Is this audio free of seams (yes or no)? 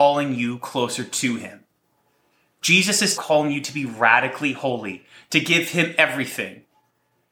no